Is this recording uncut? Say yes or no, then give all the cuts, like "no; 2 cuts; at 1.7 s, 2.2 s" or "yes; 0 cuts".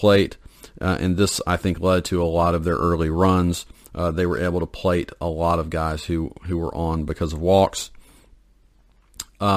yes; 0 cuts